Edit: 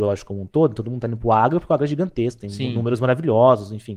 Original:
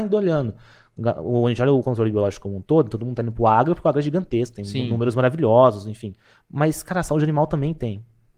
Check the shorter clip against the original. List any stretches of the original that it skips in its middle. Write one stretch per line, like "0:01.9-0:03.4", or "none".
none